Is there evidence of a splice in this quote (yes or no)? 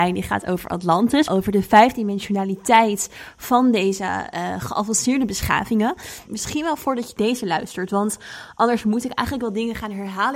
yes